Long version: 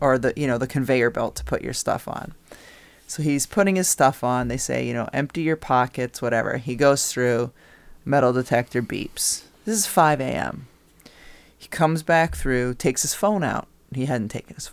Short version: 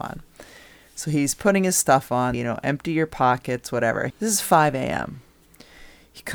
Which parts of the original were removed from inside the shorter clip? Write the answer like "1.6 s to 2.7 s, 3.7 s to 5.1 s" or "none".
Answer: 4.5 s to 4.8 s, 6.6 s to 9.6 s

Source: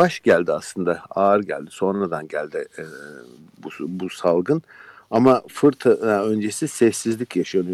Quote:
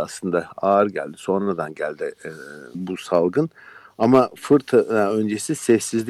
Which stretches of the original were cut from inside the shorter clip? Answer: 3.3 s to 3.9 s

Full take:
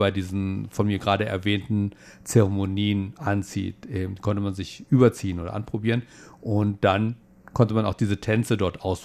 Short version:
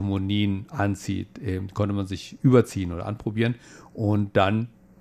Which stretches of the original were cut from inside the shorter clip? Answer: none

